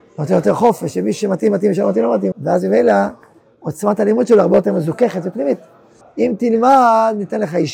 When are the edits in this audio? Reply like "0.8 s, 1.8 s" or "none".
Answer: 2.3 s, 6.0 s